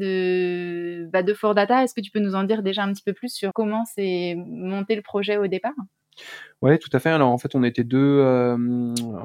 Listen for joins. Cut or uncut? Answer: cut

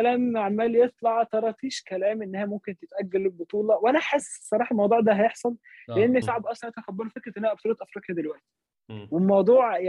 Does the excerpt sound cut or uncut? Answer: cut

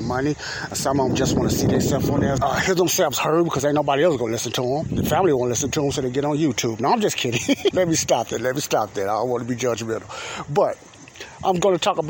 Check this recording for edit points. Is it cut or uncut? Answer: cut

